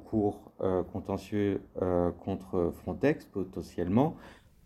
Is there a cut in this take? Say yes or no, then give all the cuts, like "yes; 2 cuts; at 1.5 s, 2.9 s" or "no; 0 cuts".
no; 0 cuts